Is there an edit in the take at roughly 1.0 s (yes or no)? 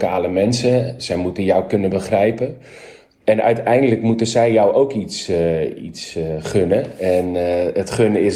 no